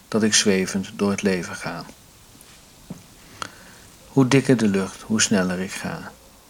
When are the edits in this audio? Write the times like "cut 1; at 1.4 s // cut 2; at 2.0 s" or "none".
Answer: cut 1; at 4.0 s